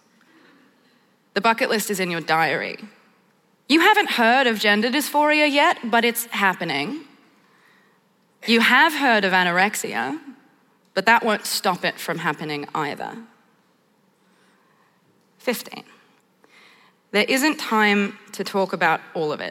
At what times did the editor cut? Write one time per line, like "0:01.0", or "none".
0:03.5